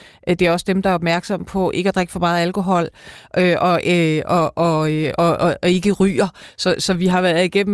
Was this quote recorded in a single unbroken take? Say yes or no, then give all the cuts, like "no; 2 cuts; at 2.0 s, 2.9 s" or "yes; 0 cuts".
yes; 0 cuts